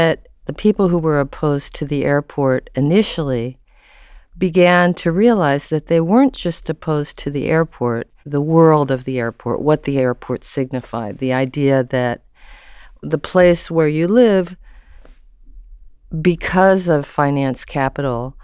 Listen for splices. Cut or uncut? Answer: cut